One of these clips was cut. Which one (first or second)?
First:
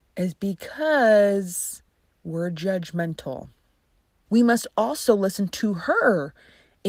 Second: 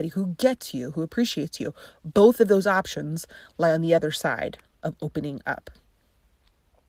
first